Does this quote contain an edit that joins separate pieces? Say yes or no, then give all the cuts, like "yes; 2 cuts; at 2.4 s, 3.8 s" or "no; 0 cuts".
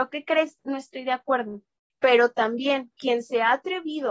yes; 1 cut; at 1.9 s